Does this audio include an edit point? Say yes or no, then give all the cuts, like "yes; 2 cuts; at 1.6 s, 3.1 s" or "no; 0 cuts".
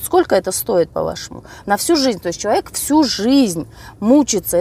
no; 0 cuts